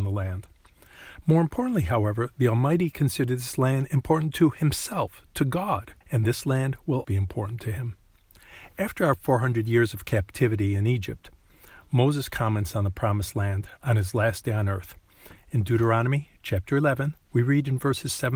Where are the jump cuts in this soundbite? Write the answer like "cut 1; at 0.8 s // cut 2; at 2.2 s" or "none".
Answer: cut 1; at 1.2 s // cut 2; at 6.0 s // cut 3; at 7.0 s

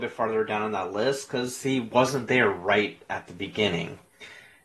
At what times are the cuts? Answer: none

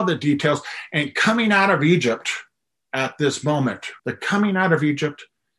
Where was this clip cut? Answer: cut 1; at 4.0 s

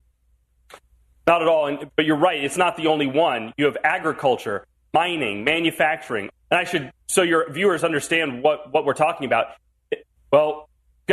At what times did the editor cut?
cut 1; at 6.3 s // cut 2; at 10.2 s

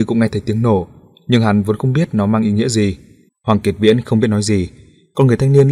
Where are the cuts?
cut 1; at 3.3 s

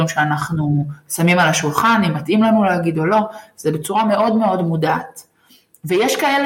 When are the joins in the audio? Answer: none

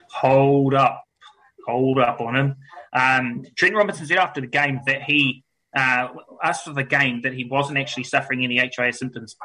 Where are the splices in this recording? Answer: none

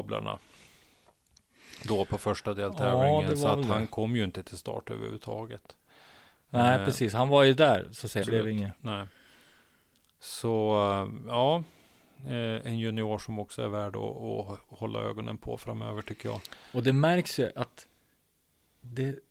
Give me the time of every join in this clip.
cut 1; at 8.2 s

